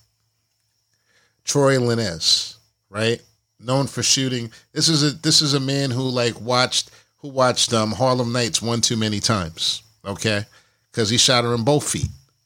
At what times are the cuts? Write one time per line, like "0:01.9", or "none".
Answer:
none